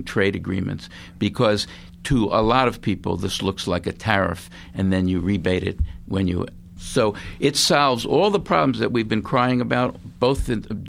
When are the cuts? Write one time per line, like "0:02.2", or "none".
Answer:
0:06.8